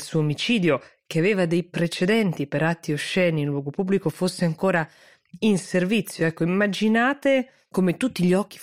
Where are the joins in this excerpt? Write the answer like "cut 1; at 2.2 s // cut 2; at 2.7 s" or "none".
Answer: none

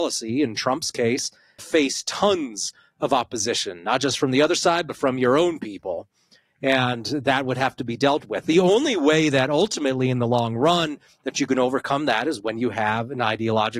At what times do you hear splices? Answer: cut 1; at 1.6 s

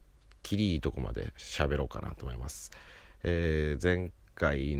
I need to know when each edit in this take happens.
none

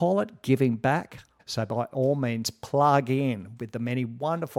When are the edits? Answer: cut 1; at 1.4 s

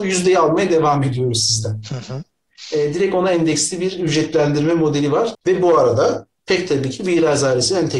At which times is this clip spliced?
cut 1; at 5.3 s

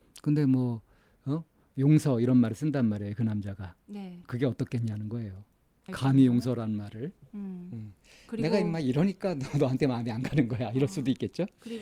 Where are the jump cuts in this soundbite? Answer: cut 1; at 5.9 s

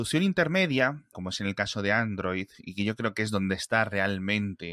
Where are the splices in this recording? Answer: cut 1; at 1.1 s

